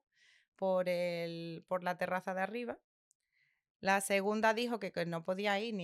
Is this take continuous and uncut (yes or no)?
yes